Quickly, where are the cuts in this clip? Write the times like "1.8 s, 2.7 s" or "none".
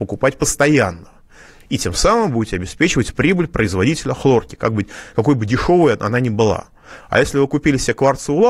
none